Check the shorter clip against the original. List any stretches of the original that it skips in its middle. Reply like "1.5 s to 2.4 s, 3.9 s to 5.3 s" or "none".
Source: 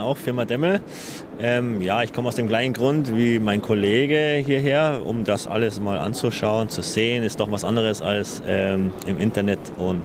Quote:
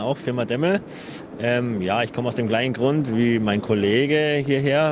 none